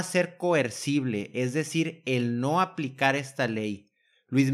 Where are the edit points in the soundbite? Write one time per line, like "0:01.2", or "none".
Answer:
none